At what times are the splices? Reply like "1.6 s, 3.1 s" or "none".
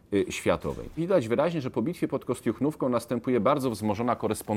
1.0 s